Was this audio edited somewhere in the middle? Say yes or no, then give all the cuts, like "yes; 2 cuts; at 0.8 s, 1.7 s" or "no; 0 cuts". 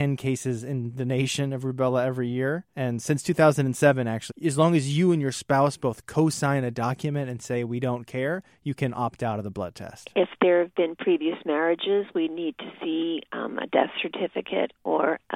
yes; 1 cut; at 4.3 s